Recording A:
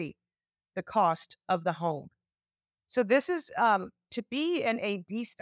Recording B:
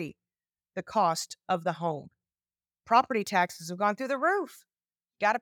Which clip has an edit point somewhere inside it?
A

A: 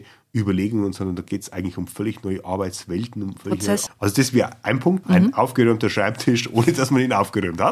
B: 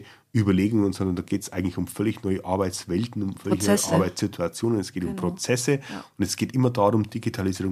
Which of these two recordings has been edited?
A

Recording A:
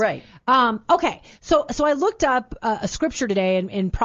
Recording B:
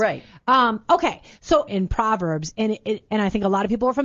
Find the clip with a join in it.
B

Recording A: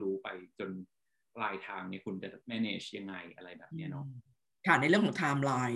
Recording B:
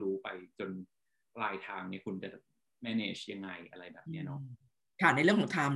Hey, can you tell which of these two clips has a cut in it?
A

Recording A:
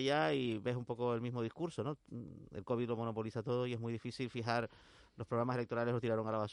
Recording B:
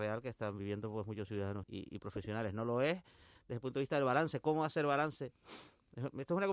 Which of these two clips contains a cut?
B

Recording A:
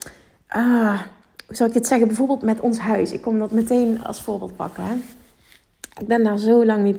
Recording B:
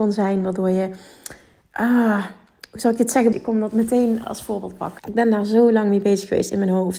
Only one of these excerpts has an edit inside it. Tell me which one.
B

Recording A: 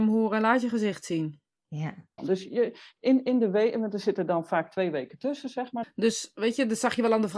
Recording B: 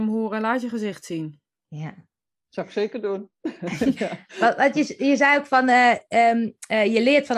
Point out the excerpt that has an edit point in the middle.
A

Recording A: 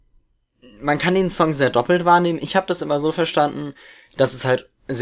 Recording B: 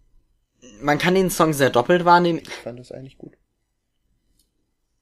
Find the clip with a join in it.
B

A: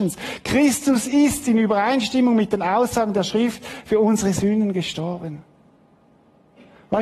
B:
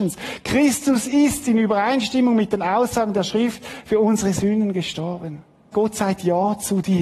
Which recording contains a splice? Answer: B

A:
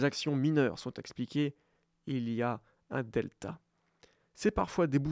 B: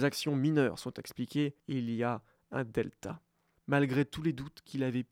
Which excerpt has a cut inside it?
B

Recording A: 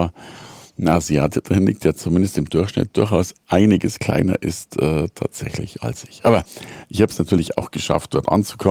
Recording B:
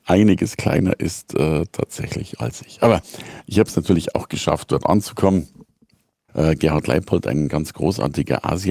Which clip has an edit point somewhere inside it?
B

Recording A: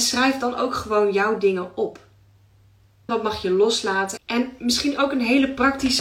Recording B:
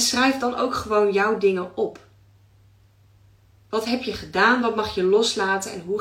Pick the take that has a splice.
A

